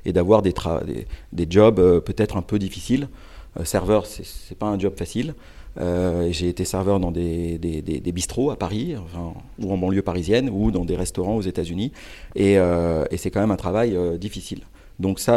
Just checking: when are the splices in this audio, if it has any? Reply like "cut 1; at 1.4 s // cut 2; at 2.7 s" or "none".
none